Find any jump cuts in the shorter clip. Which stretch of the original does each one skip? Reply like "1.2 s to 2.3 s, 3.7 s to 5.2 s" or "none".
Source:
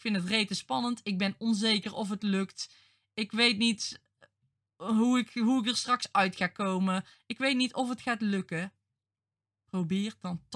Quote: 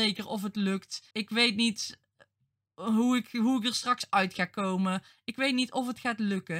2.8 s to 3.1 s